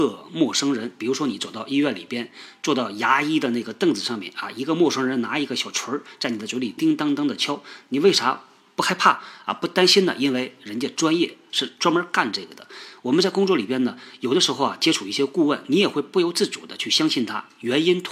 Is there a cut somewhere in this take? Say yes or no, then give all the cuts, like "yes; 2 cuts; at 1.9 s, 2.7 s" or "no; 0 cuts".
yes; 1 cut; at 6.8 s